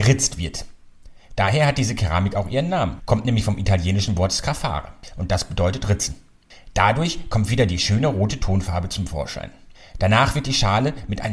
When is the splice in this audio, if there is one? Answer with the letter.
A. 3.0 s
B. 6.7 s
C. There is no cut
A